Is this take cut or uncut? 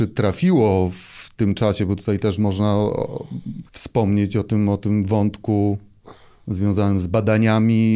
cut